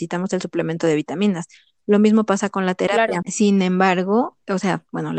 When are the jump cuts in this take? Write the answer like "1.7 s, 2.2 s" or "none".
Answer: 3.2 s